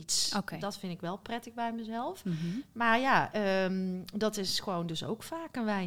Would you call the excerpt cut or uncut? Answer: uncut